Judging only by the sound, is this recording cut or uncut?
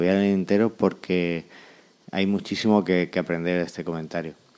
uncut